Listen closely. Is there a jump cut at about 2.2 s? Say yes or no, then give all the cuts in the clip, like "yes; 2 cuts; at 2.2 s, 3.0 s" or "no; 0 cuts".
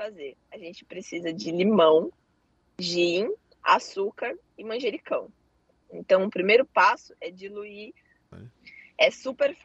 no; 2 cuts; at 5.8 s, 8.3 s